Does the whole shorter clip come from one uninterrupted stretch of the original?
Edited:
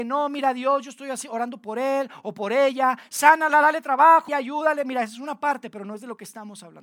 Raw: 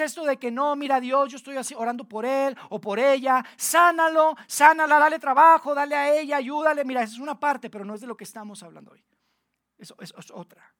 no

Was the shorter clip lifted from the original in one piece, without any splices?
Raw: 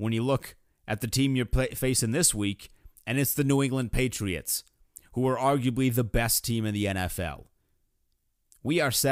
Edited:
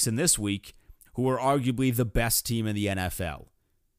no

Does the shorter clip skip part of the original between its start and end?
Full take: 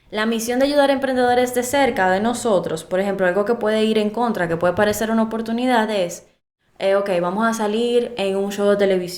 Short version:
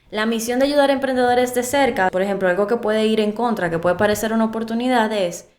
yes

